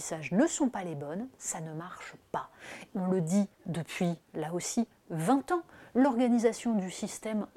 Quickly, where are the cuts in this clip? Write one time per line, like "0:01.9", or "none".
0:02.9